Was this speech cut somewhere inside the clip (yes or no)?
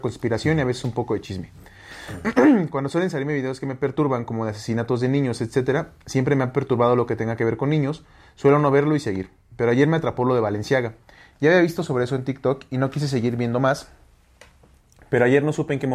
no